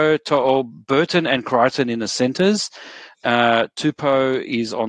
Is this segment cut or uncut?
uncut